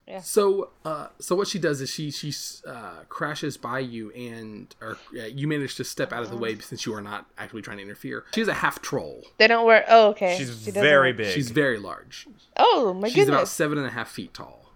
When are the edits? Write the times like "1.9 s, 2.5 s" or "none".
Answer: 8.3 s